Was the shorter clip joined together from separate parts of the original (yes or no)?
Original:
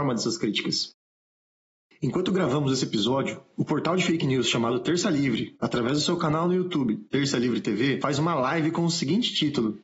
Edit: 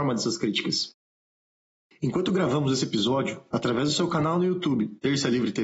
yes